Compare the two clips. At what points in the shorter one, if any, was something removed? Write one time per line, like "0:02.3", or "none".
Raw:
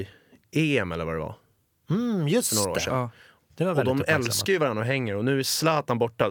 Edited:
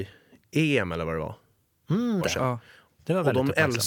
0:02.2